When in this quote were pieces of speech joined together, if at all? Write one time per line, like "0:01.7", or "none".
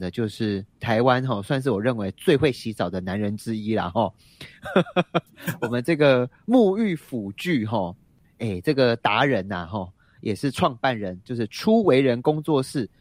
none